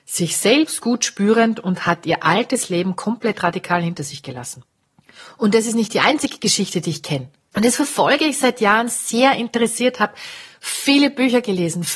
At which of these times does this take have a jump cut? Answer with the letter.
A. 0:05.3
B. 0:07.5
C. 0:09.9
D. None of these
B